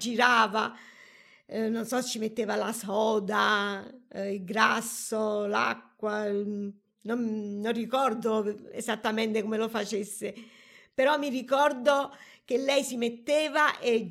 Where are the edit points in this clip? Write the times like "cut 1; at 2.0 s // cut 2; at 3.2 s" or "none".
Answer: none